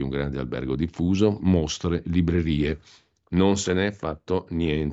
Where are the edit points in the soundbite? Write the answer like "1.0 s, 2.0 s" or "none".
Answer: 1.4 s